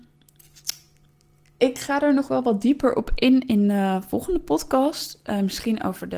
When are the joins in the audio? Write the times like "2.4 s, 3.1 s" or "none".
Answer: none